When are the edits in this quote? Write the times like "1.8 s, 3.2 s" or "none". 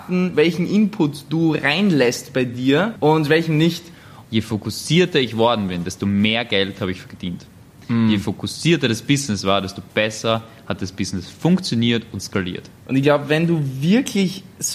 4.2 s